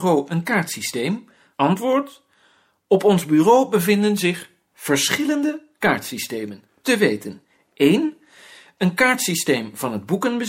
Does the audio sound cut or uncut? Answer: uncut